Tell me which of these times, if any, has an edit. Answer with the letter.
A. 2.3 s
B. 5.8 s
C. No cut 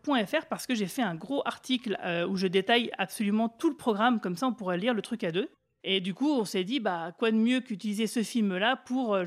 B